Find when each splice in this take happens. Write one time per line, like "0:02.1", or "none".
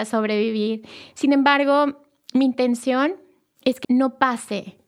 0:03.8